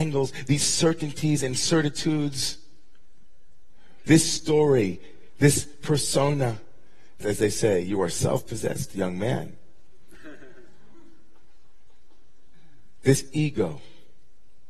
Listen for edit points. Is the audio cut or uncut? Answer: cut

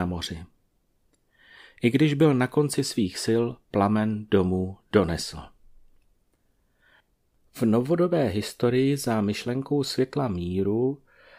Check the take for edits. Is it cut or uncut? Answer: uncut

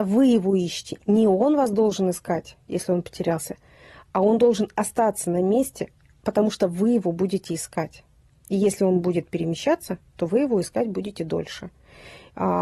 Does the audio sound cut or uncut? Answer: uncut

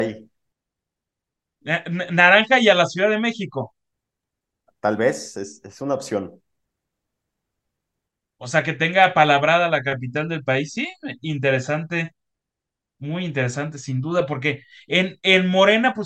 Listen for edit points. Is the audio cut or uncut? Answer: uncut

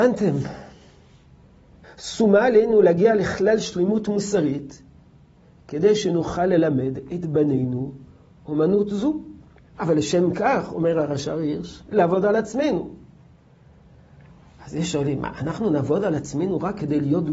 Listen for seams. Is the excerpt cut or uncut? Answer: cut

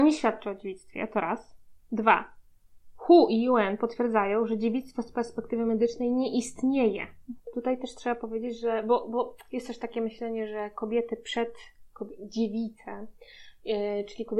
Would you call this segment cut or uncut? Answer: cut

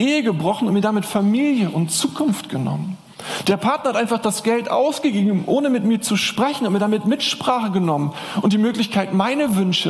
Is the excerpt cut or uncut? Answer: uncut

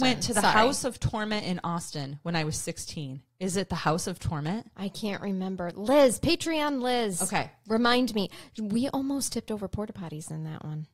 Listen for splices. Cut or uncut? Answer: uncut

